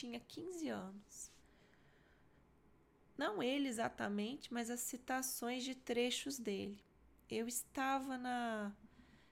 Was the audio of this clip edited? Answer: no; 0 cuts

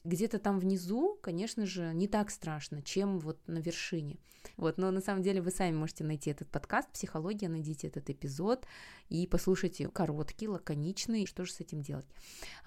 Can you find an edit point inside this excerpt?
yes; 3 cuts; at 4.5 s, 9.9 s, 11.3 s

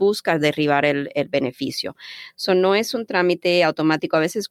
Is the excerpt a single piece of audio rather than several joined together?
yes; 0 cuts

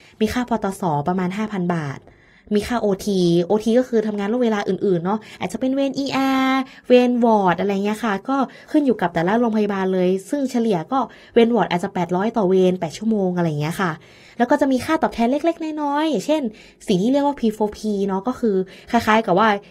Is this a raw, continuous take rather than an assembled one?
yes; 0 cuts

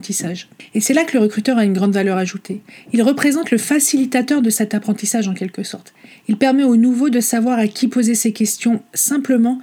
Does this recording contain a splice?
no; 0 cuts

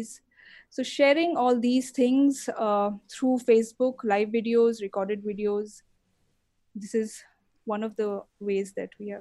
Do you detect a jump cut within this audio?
no; 0 cuts

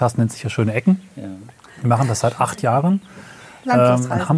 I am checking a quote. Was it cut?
no; 0 cuts

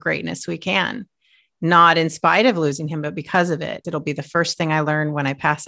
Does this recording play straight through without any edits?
no; 1 cut; at 3.8 s

